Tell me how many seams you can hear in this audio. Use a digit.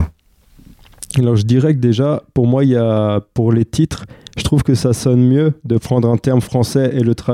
0